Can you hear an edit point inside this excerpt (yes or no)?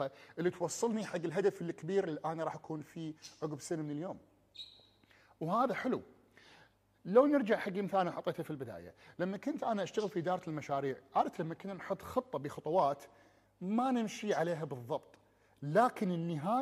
no